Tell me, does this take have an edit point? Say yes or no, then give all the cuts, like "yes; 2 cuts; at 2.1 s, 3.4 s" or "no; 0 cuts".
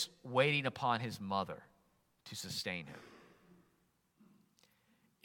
no; 0 cuts